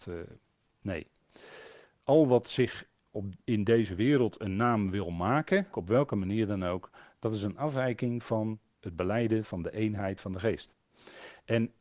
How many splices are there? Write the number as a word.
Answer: one